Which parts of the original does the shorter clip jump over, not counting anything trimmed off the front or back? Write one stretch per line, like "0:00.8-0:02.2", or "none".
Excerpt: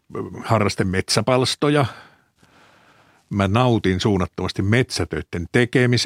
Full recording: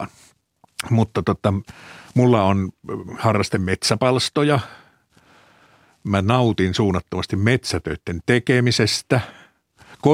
none